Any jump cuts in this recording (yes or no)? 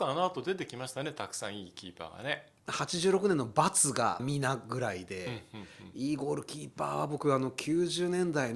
yes